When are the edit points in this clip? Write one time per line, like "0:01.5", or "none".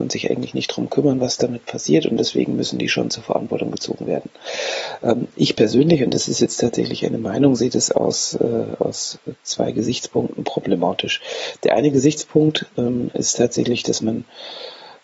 none